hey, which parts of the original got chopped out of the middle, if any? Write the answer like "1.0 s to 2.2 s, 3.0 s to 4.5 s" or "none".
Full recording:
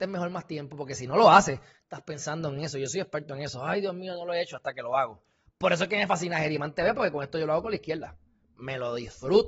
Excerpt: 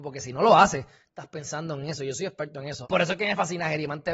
3.6 s to 5.5 s